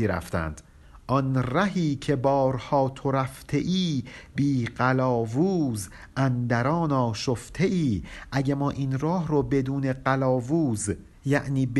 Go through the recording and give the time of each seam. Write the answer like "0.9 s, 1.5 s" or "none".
none